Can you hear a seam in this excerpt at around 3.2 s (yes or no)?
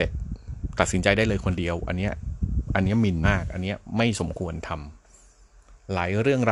yes